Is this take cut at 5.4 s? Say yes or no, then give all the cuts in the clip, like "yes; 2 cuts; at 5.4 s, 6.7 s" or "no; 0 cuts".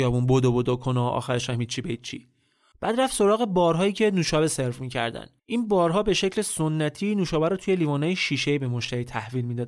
yes; 2 cuts; at 2.7 s, 5.4 s